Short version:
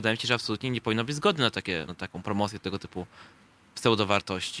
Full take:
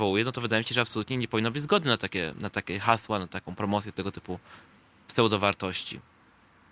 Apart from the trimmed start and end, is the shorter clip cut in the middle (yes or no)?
yes